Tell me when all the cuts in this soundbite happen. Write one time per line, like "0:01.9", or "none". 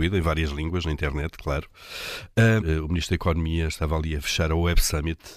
0:02.6